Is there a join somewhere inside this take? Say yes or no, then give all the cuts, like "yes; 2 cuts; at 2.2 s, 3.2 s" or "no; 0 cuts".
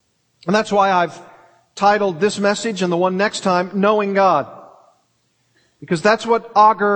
no; 0 cuts